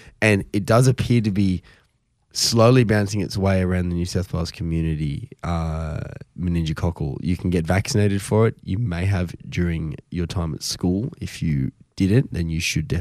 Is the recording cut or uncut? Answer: uncut